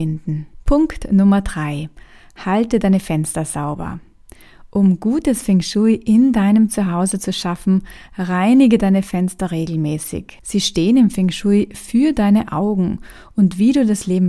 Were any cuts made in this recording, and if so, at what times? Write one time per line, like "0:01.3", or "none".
none